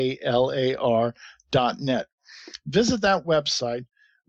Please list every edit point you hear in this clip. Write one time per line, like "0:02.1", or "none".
none